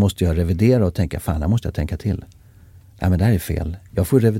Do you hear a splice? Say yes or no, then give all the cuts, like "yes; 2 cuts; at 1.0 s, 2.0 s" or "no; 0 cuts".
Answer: no; 0 cuts